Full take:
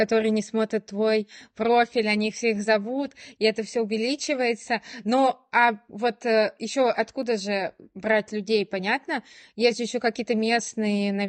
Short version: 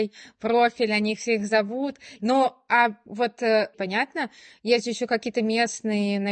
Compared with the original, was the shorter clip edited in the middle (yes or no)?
yes